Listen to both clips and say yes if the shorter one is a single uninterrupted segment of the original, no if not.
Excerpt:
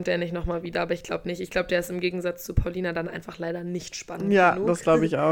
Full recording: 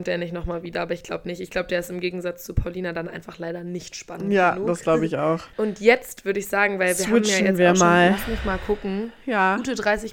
yes